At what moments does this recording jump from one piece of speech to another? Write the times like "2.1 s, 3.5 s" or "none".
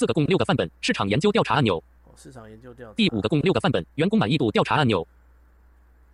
none